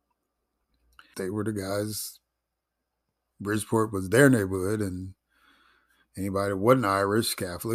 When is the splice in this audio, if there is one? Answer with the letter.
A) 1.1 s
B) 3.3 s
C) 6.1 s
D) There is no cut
A